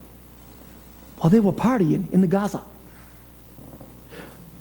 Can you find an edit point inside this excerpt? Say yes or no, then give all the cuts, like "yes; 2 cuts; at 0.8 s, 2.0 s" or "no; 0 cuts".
no; 0 cuts